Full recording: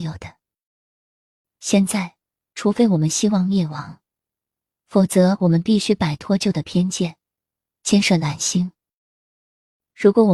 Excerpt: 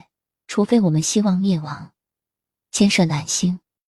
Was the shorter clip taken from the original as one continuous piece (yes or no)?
no